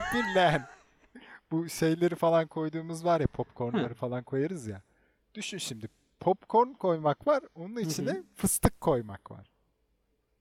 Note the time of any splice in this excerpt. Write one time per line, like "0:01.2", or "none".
none